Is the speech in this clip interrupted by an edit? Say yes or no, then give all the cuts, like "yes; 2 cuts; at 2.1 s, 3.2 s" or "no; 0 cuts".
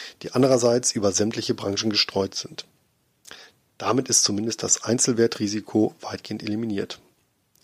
no; 0 cuts